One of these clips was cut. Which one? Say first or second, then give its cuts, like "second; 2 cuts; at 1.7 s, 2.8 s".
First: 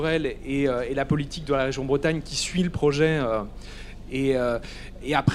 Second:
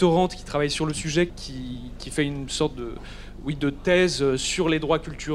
second; 1 cut; at 1.3 s